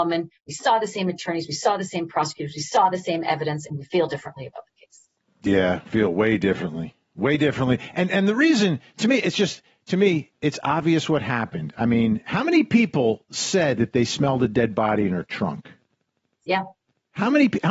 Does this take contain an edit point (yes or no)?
no